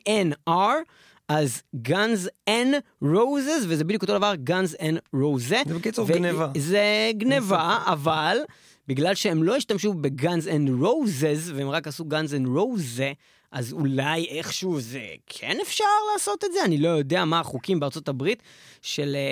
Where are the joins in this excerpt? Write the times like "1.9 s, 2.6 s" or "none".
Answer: none